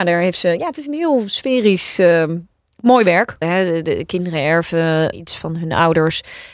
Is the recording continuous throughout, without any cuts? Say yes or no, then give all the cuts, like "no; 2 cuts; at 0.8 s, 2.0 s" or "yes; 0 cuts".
no; 2 cuts; at 3.4 s, 5.1 s